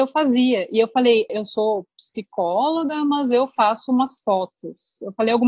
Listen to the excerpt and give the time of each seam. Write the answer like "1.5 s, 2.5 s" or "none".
1.3 s